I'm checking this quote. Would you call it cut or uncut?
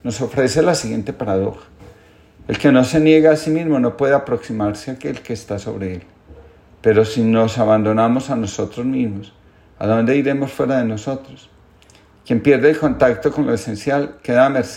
uncut